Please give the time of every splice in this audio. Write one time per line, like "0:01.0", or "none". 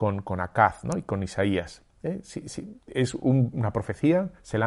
none